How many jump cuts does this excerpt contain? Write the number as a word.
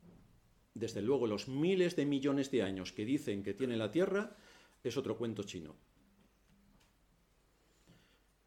zero